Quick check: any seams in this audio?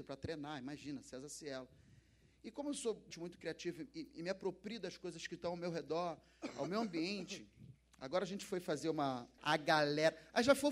yes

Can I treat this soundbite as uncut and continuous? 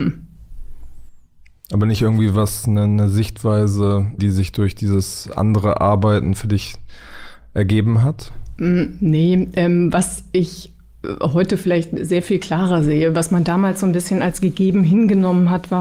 no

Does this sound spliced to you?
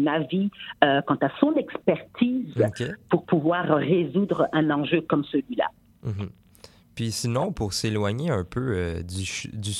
no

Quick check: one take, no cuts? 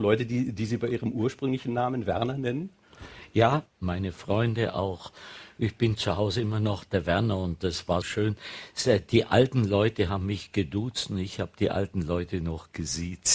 no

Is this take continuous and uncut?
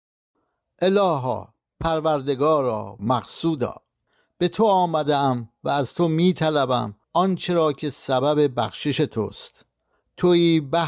no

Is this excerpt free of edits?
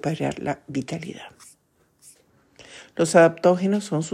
yes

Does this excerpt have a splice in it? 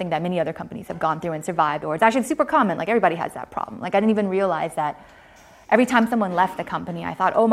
no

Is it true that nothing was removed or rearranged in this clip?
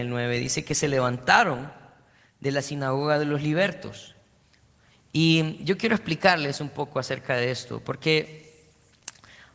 yes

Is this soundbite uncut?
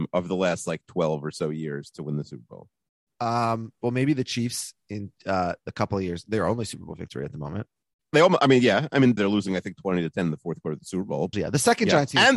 no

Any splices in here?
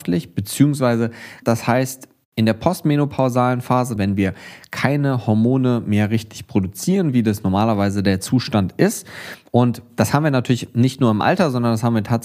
yes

